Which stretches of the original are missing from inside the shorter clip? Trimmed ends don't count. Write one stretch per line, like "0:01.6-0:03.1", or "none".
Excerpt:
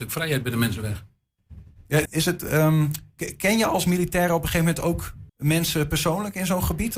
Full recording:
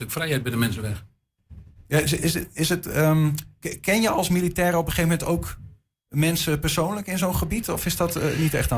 0:02.1-0:02.5
0:05.7-0:06.0

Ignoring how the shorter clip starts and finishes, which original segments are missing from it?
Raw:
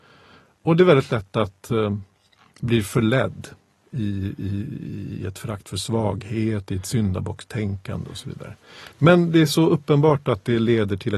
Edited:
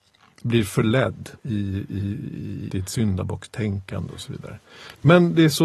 0:03.6-0:03.9
0:05.2-0:06.7

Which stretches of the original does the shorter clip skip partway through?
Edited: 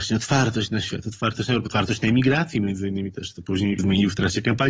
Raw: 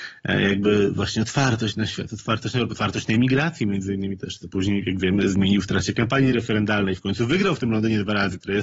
0:04.8-0:05.3

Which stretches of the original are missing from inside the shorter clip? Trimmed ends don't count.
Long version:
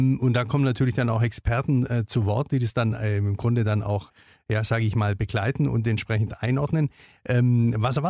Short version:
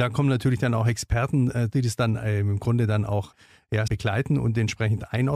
0:02.1-0:02.5
0:04.6-0:05.2

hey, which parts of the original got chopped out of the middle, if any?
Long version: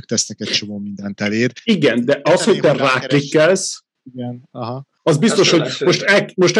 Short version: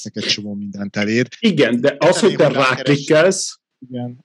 none

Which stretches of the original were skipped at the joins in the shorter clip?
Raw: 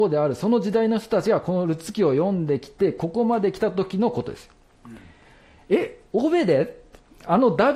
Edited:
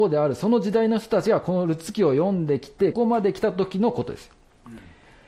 0:02.9-0:03.1

